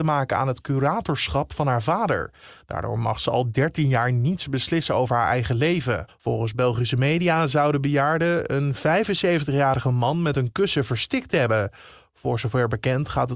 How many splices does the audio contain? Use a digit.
1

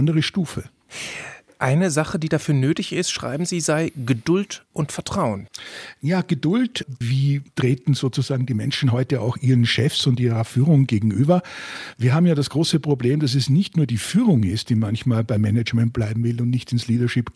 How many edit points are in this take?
1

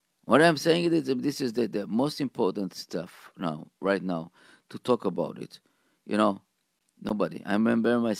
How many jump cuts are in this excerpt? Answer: 0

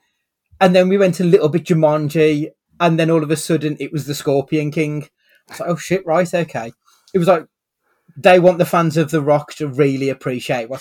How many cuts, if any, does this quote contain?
0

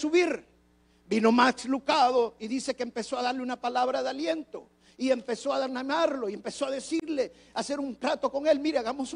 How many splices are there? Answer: 0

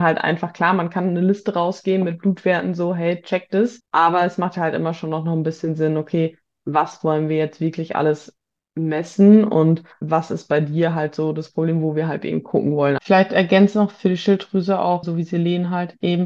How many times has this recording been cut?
2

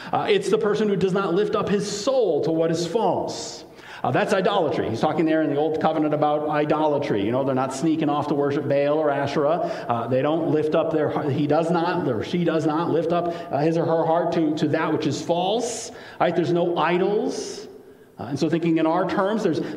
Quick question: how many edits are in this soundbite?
0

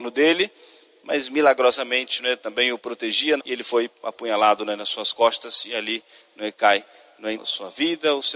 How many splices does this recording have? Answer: 2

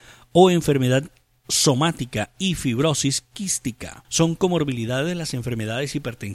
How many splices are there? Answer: 1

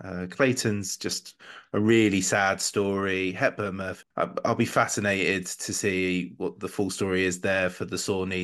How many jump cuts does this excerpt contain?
1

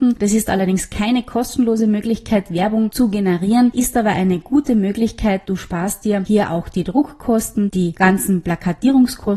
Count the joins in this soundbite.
1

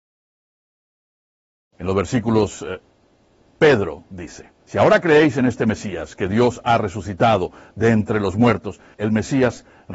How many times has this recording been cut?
3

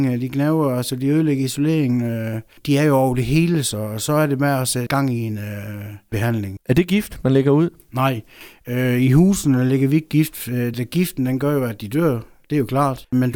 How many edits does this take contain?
2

